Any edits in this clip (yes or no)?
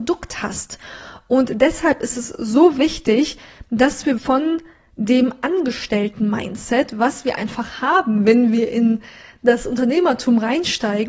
yes